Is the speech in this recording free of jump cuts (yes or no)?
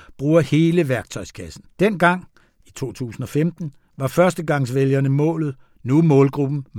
no